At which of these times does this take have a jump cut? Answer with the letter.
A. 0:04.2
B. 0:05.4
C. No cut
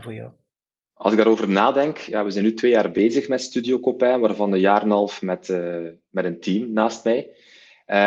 C